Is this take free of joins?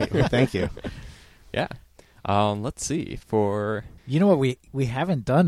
no; 1 cut; at 4.0 s

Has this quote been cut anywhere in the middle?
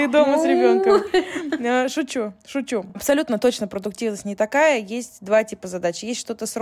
no; 0 cuts

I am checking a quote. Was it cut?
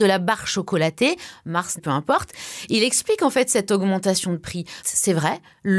yes; 2 cuts; at 1.8 s, 4.8 s

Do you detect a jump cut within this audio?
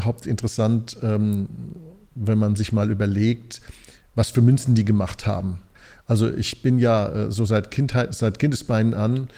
no; 0 cuts

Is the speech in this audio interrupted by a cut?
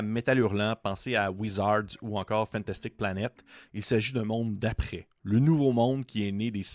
yes; 1 cut; at 3.7 s

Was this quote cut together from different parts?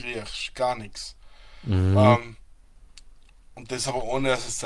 no; 0 cuts

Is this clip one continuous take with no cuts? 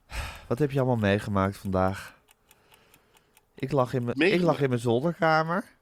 no; 1 cut; at 4.1 s

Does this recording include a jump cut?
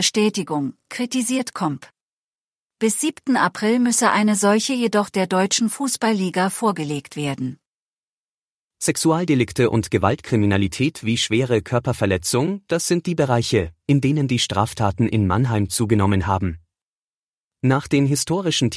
no; 0 cuts

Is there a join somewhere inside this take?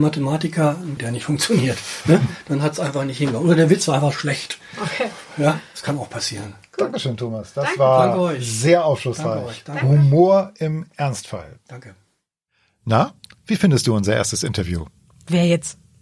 yes; 1 cut; at 1.0 s

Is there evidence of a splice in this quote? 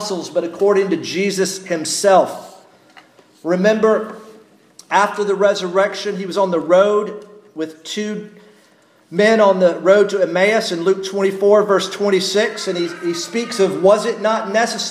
no; 0 cuts

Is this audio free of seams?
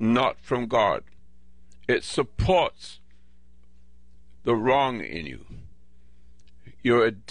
yes; 0 cuts

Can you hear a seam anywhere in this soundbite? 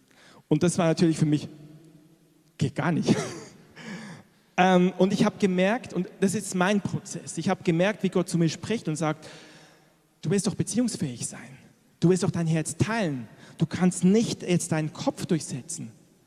no; 0 cuts

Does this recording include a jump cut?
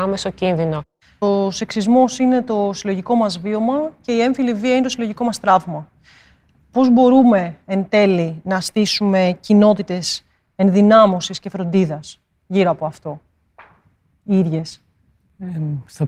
no; 0 cuts

